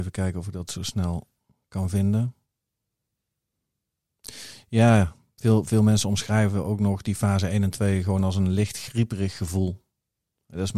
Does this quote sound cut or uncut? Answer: uncut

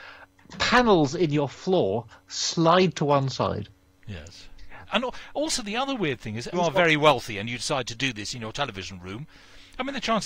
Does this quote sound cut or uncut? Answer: cut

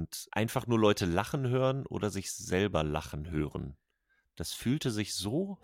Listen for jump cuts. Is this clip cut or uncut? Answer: uncut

